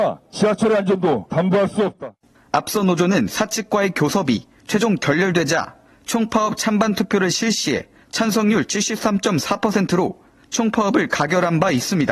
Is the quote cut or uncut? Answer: uncut